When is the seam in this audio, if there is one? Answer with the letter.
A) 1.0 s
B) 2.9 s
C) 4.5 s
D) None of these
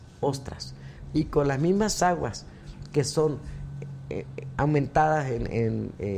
D